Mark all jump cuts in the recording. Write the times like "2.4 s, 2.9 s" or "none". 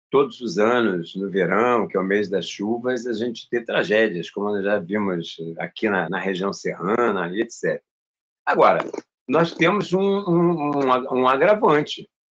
6.1 s